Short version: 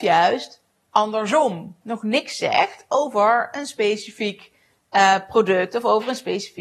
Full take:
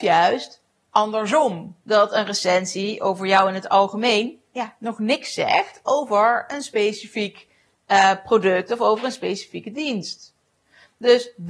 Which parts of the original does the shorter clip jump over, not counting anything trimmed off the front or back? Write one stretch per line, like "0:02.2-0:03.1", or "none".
0:01.8-0:04.8

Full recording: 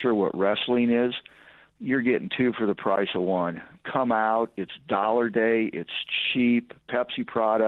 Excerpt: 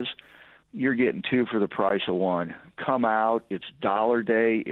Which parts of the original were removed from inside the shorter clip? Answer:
none

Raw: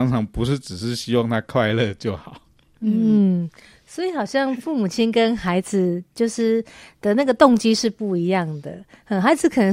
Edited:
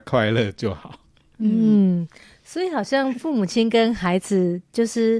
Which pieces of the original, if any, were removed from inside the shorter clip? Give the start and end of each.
none

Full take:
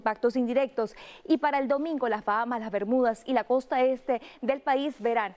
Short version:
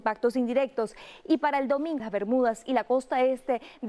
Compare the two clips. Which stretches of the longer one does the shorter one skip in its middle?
0:02.0-0:02.6

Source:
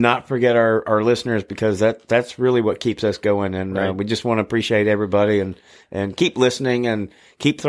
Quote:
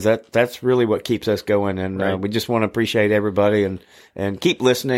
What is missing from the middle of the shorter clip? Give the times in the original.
none

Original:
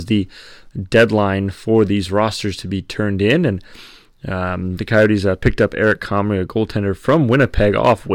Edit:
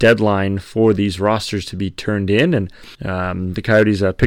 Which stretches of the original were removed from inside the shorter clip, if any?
0:03.9-0:04.2

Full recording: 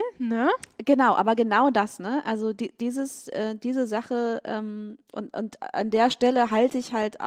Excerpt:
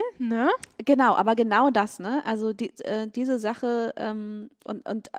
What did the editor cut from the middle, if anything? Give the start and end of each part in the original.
0:02.8-0:03.2

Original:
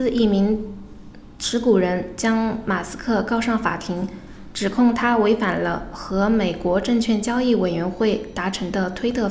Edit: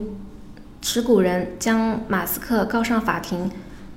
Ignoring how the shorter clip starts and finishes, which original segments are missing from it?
none

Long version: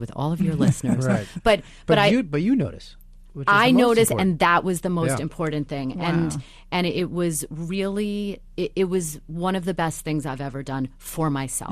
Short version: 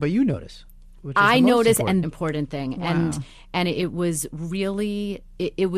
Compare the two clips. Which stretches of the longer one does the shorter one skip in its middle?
0:04.3-0:05.2

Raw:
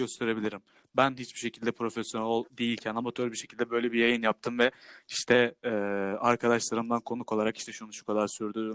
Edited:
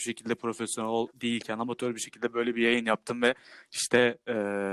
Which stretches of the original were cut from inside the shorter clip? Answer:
none

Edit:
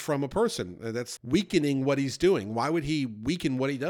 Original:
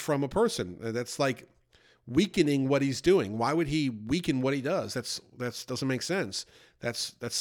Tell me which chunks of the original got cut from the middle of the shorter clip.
0:01.2-0:02.0

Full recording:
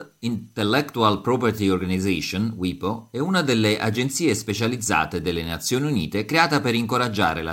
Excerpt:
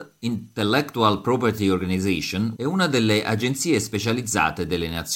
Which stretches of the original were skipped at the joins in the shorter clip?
0:02.6-0:03.1

